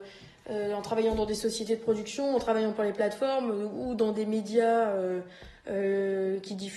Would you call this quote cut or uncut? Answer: uncut